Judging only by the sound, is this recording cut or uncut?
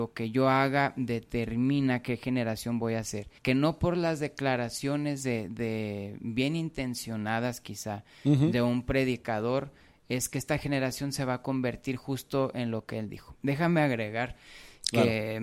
cut